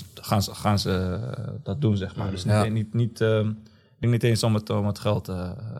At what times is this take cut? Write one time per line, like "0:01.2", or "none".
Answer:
none